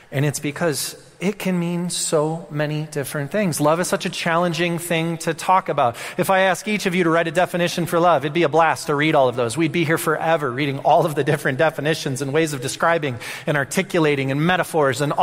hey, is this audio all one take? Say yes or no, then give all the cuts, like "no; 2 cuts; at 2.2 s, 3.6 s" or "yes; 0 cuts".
yes; 0 cuts